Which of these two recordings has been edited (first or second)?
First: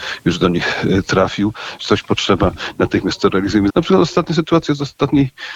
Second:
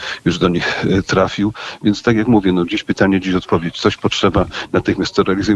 first